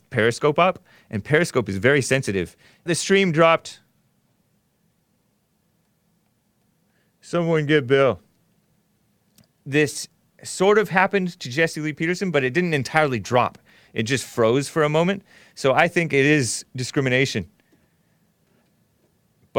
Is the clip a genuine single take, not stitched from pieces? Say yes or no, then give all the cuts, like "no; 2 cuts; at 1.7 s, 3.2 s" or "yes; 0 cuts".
no; 1 cut; at 2.9 s